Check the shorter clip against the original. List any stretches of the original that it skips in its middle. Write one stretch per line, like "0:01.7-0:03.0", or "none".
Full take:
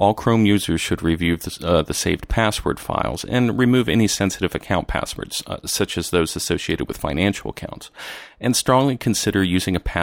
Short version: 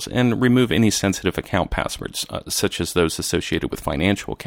none